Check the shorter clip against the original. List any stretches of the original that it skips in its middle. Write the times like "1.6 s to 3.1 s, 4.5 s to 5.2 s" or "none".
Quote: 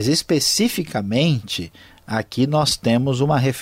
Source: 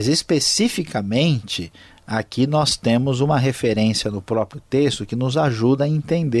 none